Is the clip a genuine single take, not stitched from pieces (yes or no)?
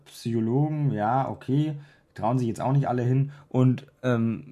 yes